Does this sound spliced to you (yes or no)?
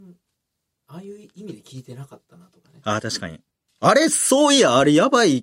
yes